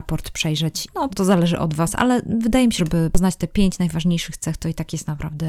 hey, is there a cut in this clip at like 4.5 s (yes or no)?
no